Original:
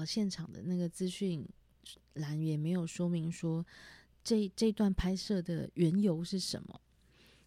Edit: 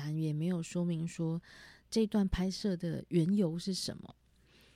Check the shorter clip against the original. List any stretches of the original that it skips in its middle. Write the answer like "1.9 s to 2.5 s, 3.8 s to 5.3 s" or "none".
4.1 s to 4.5 s